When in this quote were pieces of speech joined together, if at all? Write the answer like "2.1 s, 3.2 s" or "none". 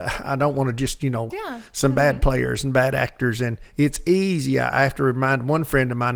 1.3 s